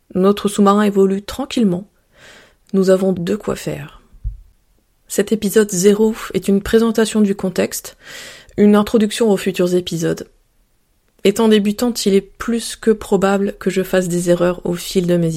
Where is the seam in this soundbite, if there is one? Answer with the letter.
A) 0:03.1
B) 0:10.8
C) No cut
A